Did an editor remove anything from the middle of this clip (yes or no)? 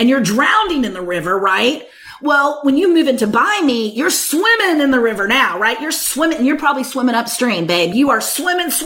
no